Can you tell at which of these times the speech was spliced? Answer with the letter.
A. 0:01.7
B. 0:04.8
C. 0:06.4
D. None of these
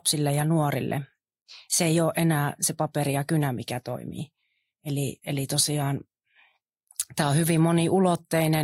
D